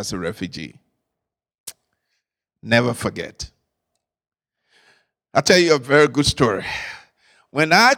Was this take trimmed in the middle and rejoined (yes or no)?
no